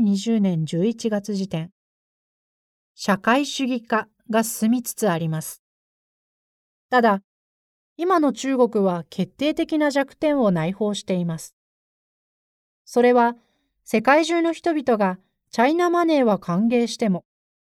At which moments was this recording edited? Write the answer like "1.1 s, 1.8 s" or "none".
none